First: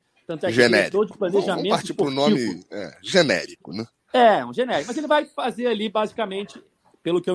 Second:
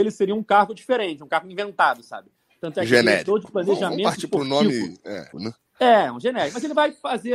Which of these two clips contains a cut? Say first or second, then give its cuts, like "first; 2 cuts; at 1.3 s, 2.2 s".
second; 1 cut; at 5.3 s